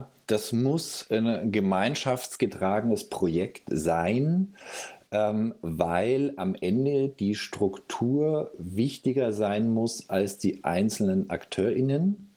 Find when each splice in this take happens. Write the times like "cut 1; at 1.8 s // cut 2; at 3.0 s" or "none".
none